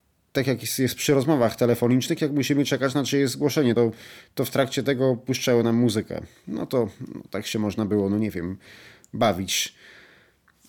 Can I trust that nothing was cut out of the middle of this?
yes; 0 cuts

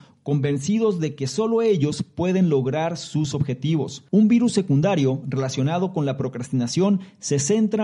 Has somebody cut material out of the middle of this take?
yes; 1 cut; at 4.1 s

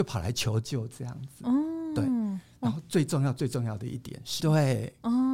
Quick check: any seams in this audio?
yes; 1 cut; at 4.4 s

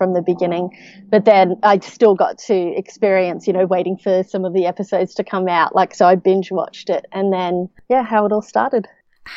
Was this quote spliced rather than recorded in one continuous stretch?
no; 0 cuts

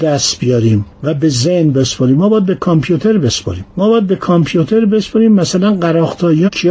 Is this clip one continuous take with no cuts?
no; 2 cuts; at 0.9 s, 3.7 s

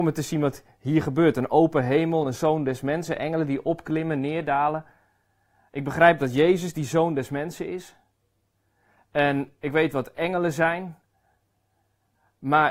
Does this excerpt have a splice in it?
no; 0 cuts

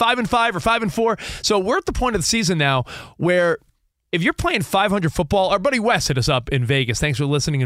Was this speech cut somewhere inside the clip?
no; 0 cuts

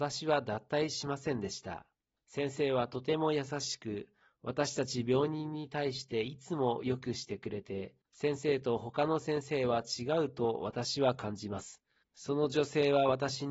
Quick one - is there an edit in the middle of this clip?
yes; 3 cuts; at 2.2 s, 8.0 s, 12.0 s

